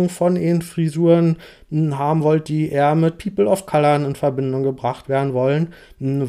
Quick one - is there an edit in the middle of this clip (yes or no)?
no